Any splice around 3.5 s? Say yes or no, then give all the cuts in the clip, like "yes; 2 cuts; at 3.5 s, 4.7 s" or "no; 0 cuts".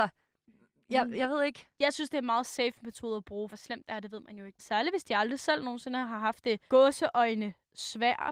yes; 3 cuts; at 3.5 s, 4.6 s, 6.7 s